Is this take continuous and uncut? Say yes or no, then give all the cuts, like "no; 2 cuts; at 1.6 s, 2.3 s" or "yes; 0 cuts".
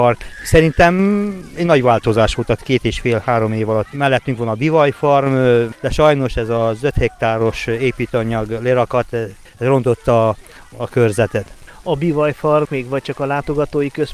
no; 1 cut; at 12.7 s